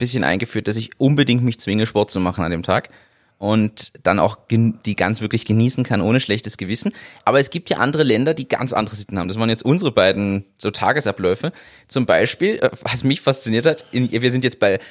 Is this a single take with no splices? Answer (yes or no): yes